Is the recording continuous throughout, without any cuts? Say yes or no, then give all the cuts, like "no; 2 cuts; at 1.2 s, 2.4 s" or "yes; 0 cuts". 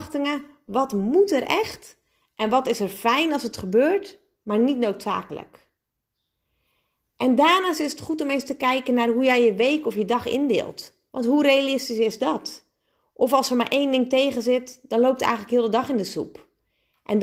no; 1 cut; at 11.1 s